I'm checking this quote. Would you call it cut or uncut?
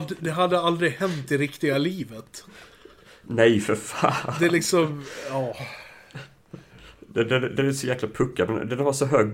uncut